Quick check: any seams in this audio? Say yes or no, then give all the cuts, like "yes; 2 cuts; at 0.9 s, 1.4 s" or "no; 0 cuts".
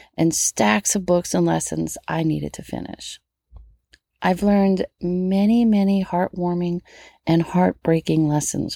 no; 0 cuts